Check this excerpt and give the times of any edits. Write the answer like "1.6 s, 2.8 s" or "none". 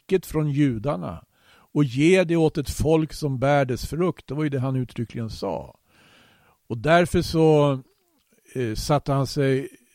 none